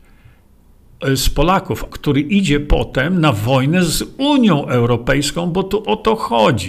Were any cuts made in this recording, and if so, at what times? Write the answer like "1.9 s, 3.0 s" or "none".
1.9 s